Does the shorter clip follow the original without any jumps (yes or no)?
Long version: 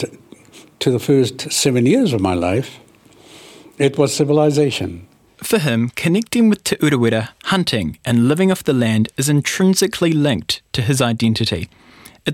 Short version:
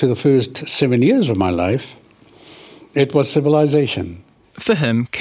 yes